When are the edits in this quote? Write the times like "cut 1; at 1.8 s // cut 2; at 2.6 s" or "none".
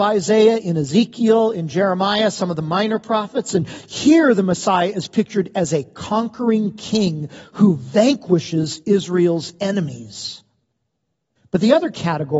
cut 1; at 11.3 s